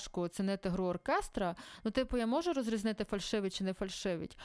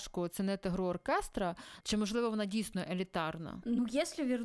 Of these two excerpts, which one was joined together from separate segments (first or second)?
second